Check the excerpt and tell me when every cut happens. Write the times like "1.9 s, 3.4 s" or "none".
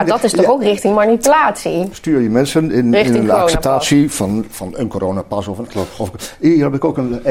1.9 s

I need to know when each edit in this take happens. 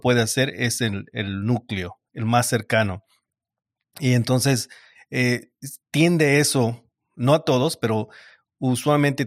none

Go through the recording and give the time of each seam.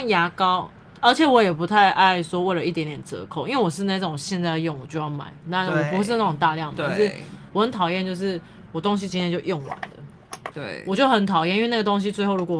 9.1 s, 10.5 s

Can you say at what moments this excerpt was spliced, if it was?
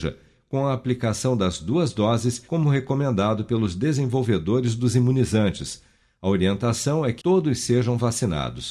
7.2 s

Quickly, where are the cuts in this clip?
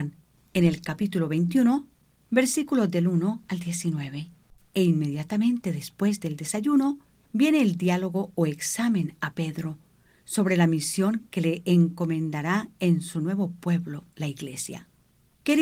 4.6 s

